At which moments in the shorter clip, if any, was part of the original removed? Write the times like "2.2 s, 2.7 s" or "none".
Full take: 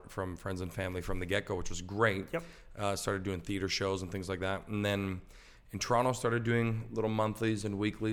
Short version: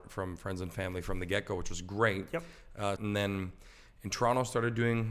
3.0 s